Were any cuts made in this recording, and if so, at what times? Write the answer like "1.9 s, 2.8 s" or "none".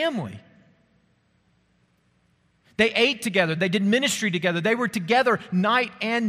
3.6 s